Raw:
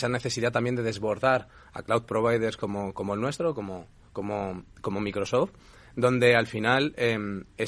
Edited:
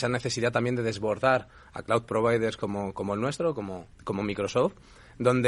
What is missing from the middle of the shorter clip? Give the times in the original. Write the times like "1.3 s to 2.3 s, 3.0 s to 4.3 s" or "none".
3.9 s to 4.7 s